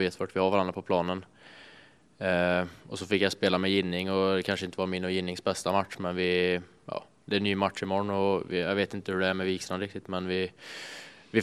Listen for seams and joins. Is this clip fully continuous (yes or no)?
yes